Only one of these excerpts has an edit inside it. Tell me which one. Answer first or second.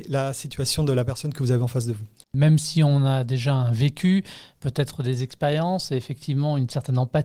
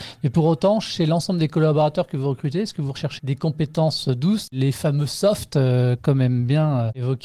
second